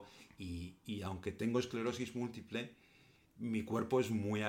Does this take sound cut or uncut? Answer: uncut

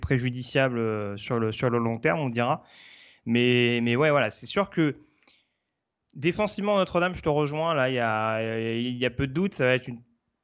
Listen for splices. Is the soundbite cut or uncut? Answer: uncut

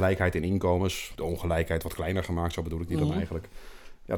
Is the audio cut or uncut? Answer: uncut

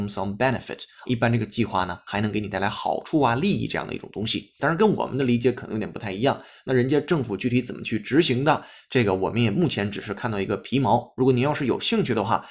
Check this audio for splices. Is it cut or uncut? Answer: cut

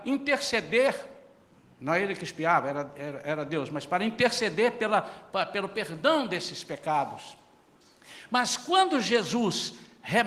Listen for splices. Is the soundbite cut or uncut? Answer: uncut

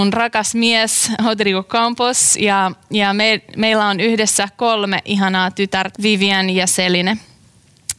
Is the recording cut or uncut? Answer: cut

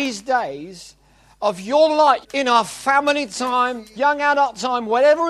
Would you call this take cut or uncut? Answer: cut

